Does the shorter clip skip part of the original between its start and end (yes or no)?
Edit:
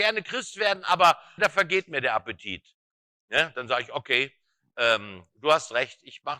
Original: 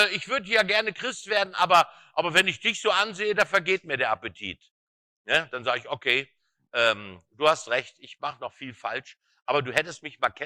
yes